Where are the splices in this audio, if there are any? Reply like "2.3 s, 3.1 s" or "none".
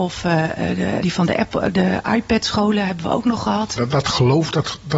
1.0 s, 3.8 s